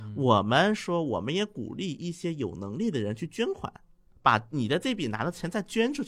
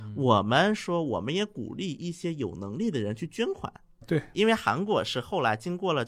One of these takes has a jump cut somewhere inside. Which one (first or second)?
second